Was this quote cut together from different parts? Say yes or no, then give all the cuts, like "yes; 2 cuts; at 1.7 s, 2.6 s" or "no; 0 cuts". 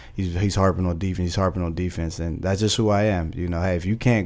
no; 0 cuts